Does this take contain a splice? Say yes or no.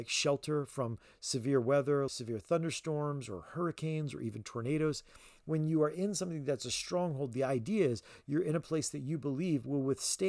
yes